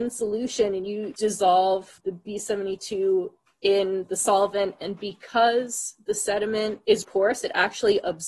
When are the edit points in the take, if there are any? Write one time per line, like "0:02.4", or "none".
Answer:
none